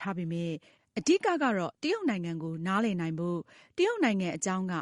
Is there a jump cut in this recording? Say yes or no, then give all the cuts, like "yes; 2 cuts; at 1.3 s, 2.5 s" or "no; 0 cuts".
no; 0 cuts